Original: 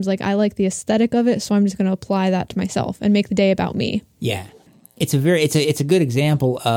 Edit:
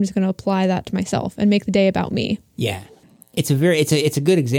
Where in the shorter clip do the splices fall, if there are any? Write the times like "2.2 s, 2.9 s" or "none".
none